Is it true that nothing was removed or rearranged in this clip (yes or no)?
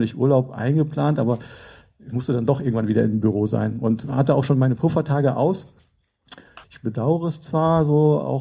no